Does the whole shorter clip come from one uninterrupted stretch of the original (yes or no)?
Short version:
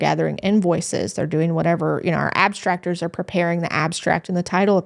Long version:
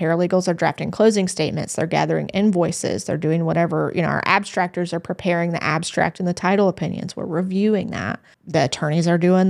yes